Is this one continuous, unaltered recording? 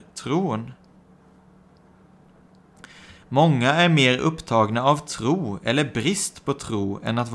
yes; 0 cuts

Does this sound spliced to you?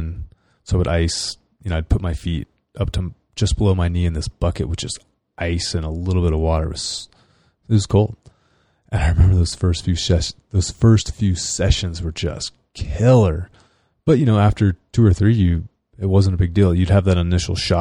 no; 0 cuts

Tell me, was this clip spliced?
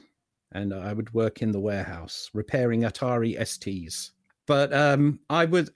yes; 1 cut; at 4.3 s

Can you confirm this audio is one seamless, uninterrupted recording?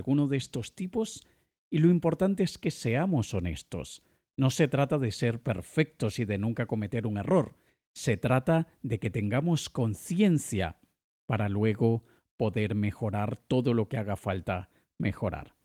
yes; 0 cuts

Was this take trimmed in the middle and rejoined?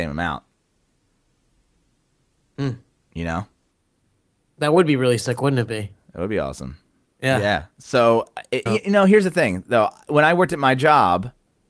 yes; 1 cut; at 8.7 s

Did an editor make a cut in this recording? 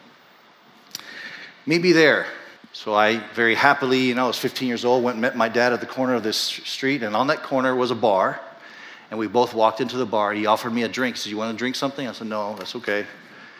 yes; 1 cut; at 2.6 s

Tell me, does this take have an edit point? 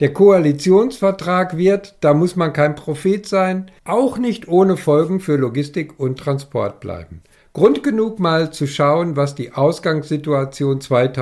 yes; 1 cut; at 3.8 s

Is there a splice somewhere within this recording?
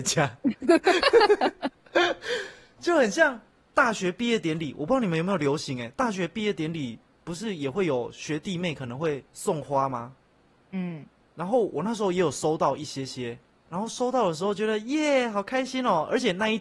no; 0 cuts

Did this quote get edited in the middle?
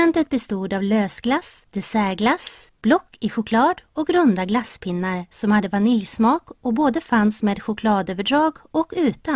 yes; 1 cut; at 2.7 s

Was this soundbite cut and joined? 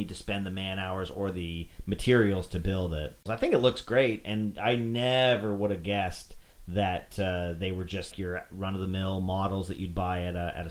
yes; 2 cuts; at 3.3 s, 8.1 s

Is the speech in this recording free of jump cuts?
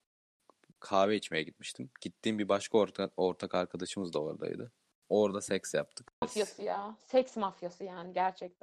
no; 2 cuts; at 5.0 s, 6.2 s

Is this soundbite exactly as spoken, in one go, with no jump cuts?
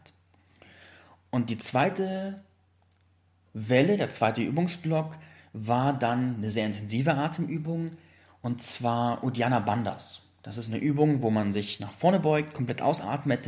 yes; 0 cuts

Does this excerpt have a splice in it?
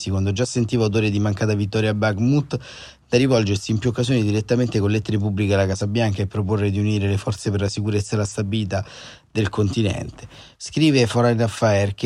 yes; 1 cut; at 10.5 s

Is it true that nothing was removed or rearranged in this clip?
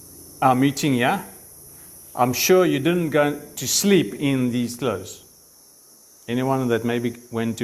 yes; 0 cuts

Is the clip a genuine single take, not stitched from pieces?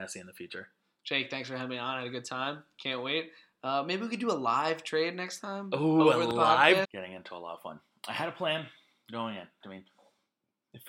no; 2 cuts; at 6.8 s, 9.6 s

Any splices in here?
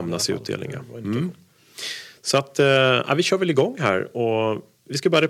no; 0 cuts

